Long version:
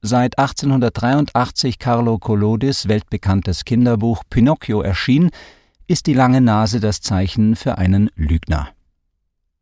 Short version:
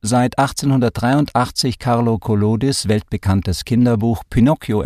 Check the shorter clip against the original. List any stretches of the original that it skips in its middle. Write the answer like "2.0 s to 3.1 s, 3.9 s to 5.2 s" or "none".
none